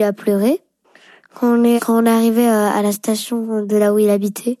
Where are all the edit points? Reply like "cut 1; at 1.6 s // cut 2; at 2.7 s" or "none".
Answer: cut 1; at 1.8 s